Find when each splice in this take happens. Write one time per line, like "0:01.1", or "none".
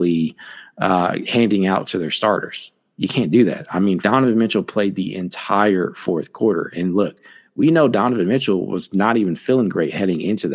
0:04.0